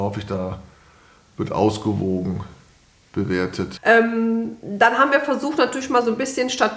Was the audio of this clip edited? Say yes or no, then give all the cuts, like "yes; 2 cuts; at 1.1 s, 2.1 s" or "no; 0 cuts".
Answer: yes; 1 cut; at 3.8 s